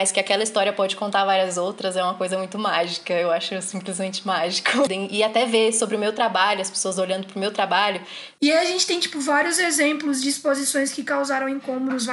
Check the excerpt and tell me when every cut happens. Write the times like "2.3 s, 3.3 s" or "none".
4.9 s, 8.4 s